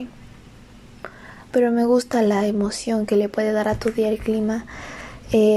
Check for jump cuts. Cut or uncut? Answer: cut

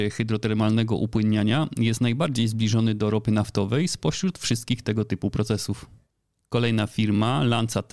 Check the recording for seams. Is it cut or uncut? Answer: uncut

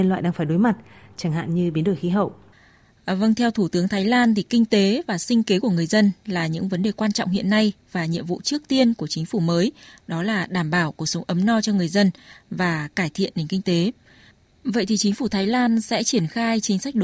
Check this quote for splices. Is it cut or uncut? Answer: uncut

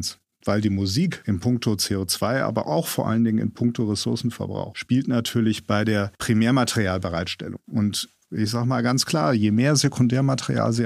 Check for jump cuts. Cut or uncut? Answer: uncut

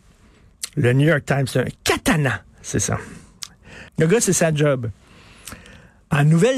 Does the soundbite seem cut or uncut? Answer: cut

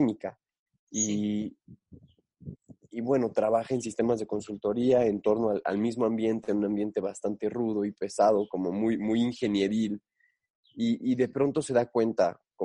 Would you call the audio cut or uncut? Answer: uncut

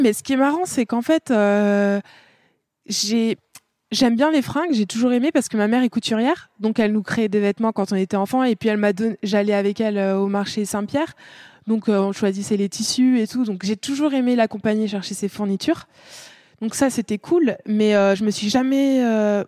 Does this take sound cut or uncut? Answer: uncut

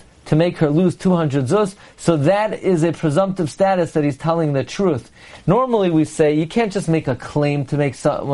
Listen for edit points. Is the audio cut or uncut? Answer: uncut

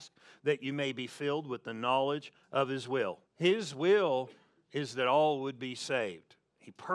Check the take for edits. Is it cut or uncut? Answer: cut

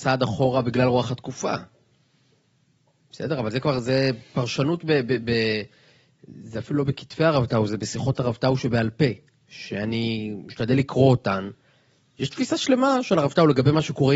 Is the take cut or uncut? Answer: uncut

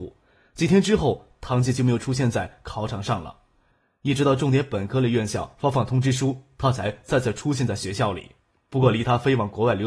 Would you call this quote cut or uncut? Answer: uncut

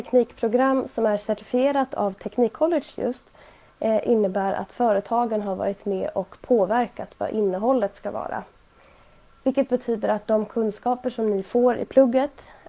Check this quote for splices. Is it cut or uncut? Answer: uncut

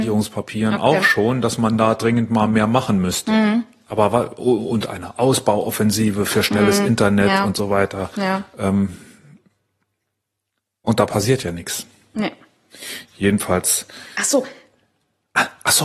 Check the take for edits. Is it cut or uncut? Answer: uncut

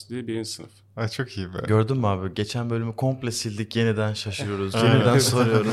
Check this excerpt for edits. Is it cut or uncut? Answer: uncut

